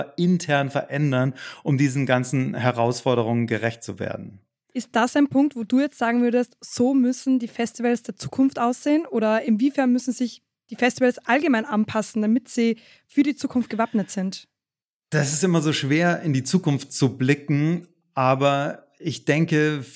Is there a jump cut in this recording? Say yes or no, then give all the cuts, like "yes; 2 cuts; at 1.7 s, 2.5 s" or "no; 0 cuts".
no; 0 cuts